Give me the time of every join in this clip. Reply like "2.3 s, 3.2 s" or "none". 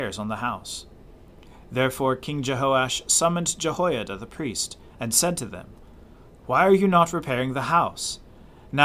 4.9 s